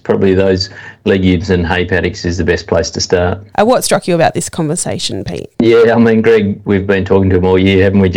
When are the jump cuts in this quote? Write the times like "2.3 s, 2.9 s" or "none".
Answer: 3.5 s, 5.5 s